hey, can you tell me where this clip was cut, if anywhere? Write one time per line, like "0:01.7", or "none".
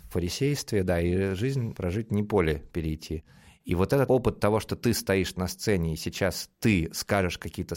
0:04.1